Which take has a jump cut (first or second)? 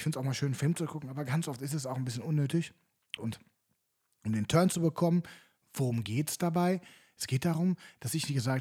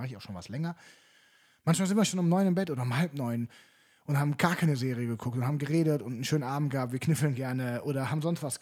first